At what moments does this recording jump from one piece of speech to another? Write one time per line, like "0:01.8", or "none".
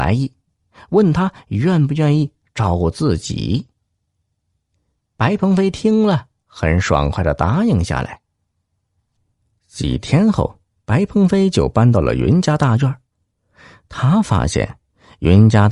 0:04.9